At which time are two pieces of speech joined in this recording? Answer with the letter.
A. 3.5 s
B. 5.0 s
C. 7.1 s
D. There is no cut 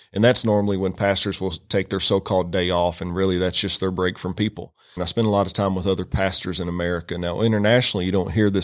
B